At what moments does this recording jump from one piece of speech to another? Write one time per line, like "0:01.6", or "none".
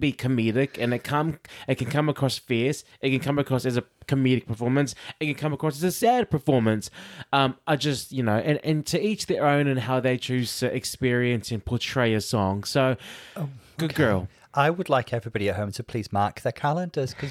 none